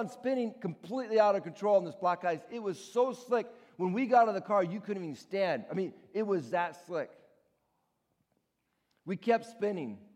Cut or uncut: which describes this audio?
uncut